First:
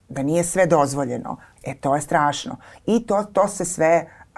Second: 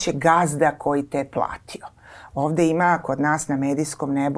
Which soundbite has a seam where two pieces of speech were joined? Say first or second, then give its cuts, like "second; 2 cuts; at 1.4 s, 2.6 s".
first; 1 cut; at 1.6 s